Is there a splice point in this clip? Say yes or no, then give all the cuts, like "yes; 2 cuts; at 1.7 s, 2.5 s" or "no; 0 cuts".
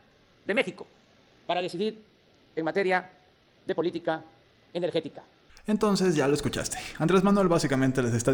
no; 0 cuts